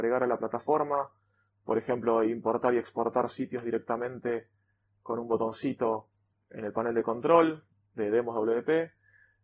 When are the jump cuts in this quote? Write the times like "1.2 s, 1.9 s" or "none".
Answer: none